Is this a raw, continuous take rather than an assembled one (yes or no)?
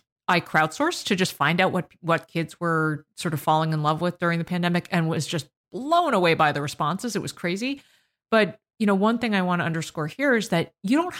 yes